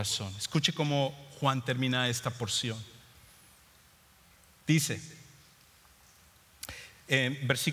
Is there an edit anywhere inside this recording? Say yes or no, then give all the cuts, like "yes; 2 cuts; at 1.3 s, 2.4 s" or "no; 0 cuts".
no; 0 cuts